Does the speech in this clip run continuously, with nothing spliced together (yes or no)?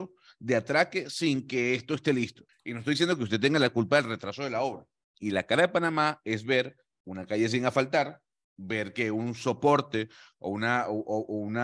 no